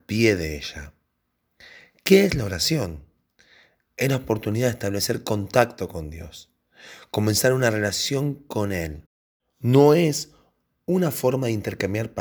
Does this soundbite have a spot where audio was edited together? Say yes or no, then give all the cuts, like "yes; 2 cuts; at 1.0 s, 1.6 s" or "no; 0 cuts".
no; 0 cuts